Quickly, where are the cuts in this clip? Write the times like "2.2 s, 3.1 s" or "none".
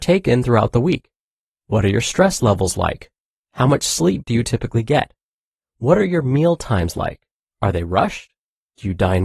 none

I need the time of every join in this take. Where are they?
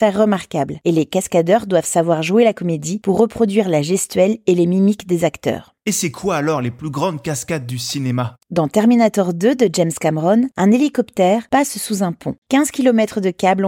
12.4 s

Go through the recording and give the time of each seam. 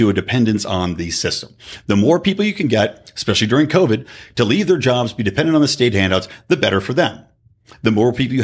none

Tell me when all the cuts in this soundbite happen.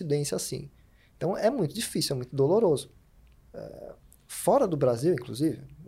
3.4 s

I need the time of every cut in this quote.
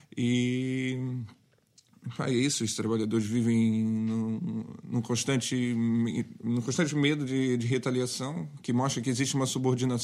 none

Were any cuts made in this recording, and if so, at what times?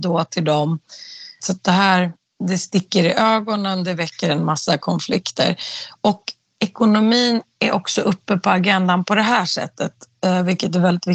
1.4 s

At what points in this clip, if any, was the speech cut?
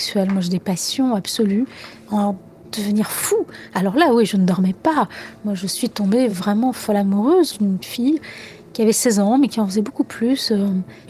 none

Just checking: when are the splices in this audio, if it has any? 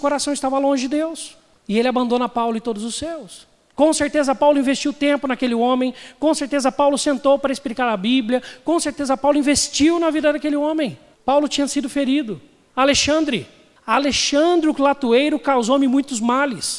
11.1 s, 12.7 s

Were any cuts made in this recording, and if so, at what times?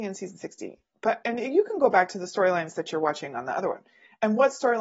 1.2 s

